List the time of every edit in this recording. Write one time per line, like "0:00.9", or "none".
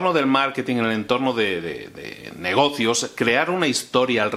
none